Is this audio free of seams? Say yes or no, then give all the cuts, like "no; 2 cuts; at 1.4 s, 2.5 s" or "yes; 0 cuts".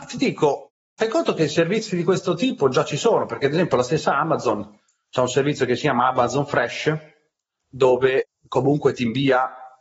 yes; 0 cuts